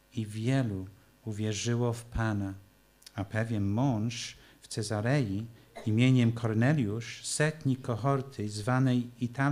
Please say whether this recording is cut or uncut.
cut